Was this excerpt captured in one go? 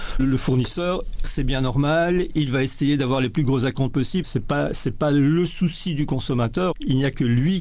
no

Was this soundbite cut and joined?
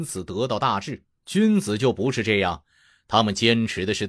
yes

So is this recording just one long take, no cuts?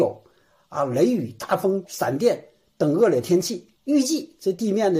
no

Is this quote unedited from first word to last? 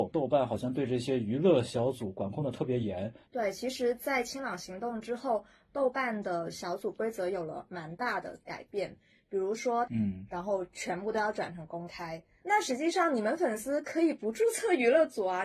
no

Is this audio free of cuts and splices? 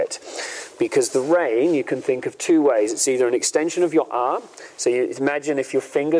yes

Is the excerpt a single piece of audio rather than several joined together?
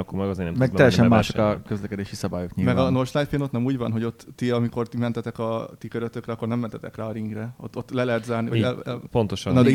yes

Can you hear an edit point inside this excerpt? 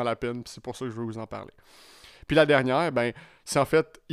no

